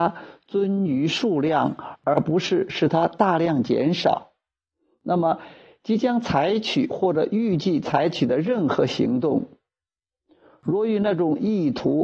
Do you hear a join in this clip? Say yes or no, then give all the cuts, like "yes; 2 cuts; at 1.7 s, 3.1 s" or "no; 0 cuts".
no; 0 cuts